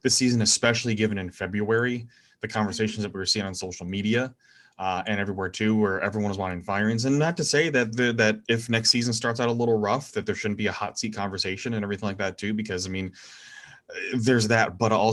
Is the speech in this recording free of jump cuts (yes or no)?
yes